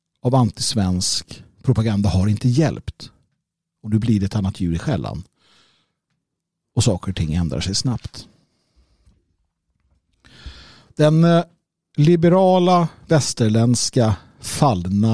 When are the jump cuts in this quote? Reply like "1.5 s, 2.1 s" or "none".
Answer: none